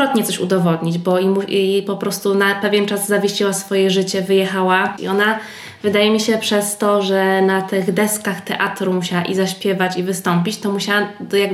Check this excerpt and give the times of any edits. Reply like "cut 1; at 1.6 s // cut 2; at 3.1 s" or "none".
cut 1; at 5.0 s